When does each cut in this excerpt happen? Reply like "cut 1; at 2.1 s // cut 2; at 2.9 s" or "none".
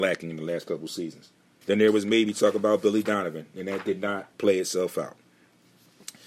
cut 1; at 1.6 s // cut 2; at 4.3 s

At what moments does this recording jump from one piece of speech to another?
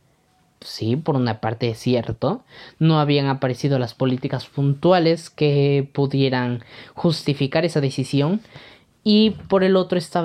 none

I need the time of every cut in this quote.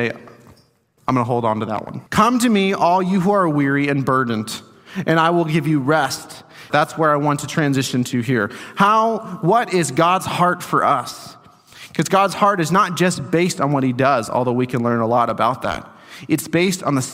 cut 1; at 2.1 s // cut 2; at 6.7 s

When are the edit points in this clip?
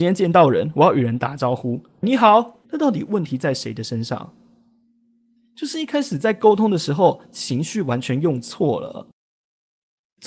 cut 1; at 2.6 s

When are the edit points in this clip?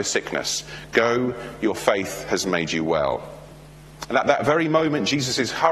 none

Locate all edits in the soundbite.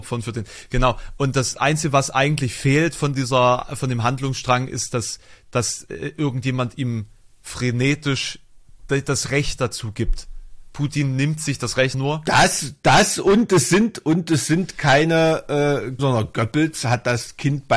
cut 1; at 11.9 s // cut 2; at 16.0 s

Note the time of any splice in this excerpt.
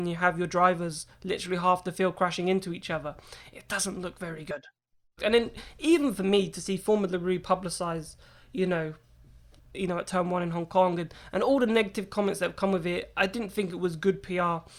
cut 1; at 5.2 s // cut 2; at 9.6 s

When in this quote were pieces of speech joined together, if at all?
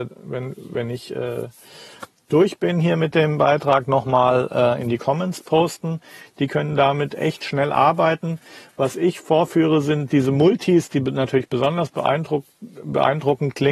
cut 1; at 6.3 s

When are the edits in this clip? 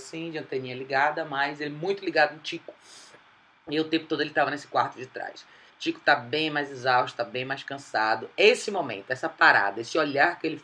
cut 1; at 5.7 s

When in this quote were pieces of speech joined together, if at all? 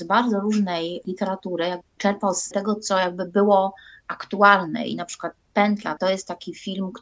cut 1; at 6.0 s

